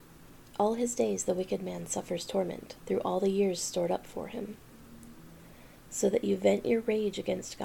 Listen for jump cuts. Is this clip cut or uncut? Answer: cut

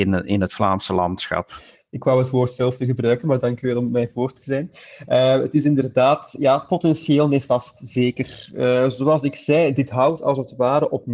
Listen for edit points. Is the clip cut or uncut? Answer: uncut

